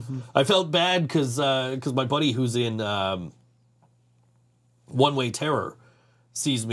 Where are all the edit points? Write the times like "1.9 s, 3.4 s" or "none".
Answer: none

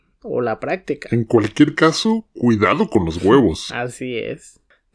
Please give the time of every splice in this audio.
none

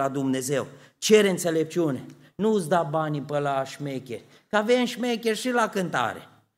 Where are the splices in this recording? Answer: 2.3 s

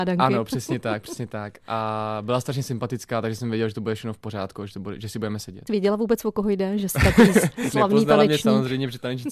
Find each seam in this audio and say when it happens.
5.7 s

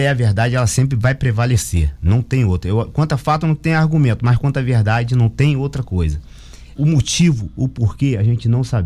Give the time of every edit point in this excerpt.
6.8 s

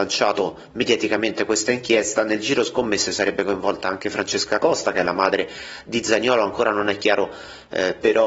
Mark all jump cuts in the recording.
none

